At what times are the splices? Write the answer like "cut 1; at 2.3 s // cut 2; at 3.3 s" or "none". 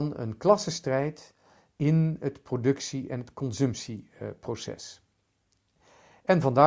none